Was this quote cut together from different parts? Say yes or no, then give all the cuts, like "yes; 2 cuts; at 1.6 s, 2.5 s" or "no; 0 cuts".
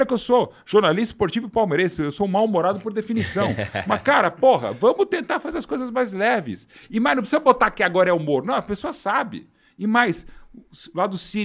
no; 0 cuts